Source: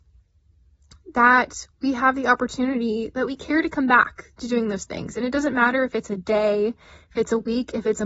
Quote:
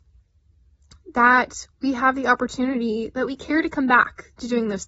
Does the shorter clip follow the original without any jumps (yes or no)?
yes